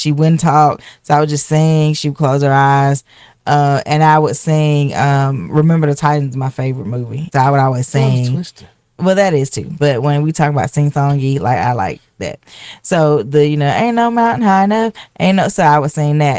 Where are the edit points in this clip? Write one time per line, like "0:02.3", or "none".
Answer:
0:07.3
0:09.0